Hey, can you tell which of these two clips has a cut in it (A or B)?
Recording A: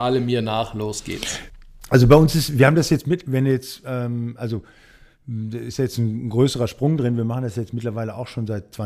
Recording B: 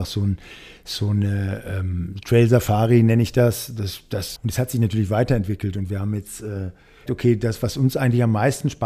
B